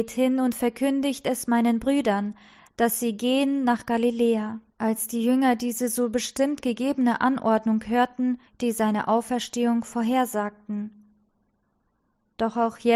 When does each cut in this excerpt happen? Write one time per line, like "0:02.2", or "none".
0:04.7
0:08.5